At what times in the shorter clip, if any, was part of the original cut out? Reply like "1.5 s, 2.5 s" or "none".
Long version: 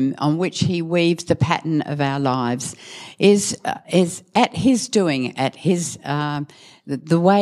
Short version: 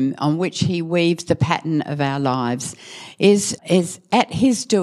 3.6 s